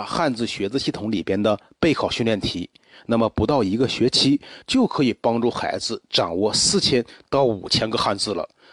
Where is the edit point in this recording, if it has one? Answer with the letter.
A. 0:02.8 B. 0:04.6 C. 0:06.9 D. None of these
B